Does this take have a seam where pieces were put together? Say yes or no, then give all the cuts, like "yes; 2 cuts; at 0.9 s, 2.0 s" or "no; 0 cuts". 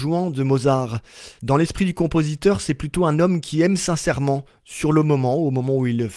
yes; 1 cut; at 1.4 s